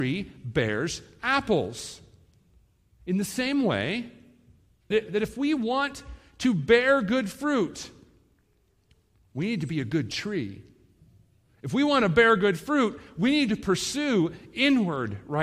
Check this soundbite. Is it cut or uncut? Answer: cut